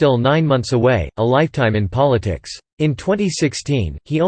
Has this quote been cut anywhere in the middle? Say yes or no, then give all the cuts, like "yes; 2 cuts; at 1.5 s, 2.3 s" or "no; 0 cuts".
yes; 1 cut; at 2.7 s